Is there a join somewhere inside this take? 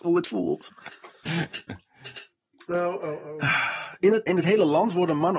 yes; 1 cut; at 4.3 s

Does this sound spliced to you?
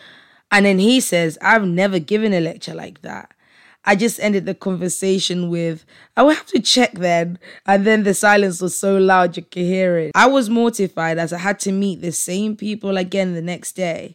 no; 0 cuts

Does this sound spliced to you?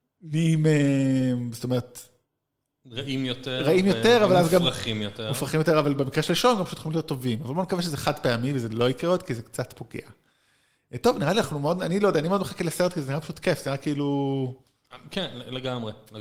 no; 0 cuts

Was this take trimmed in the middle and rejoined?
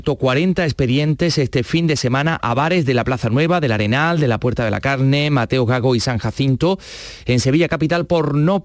no; 0 cuts

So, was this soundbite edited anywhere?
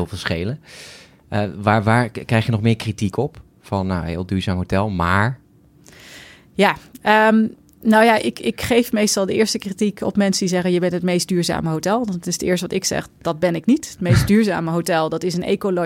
no; 0 cuts

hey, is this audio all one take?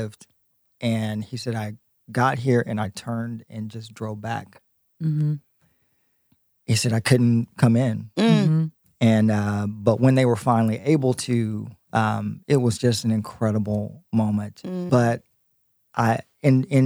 no; 1 cut; at 14.9 s

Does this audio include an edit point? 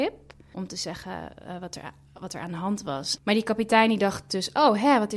yes; 1 cut; at 3.2 s

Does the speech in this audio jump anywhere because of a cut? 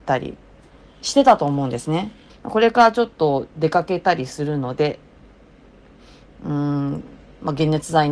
yes; 1 cut; at 2.3 s

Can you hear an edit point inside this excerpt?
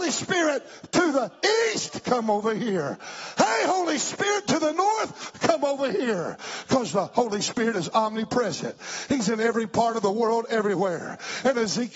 no; 0 cuts

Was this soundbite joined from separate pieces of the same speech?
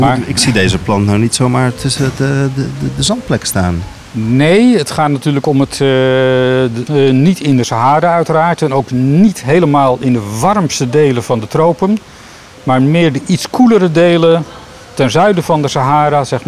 yes; 1 cut; at 6.9 s

